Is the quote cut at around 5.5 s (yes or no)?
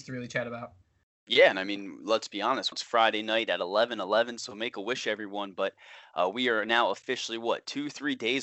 no